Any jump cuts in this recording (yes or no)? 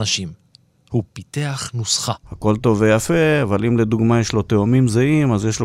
yes